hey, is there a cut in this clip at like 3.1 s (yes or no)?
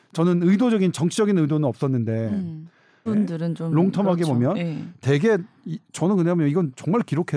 yes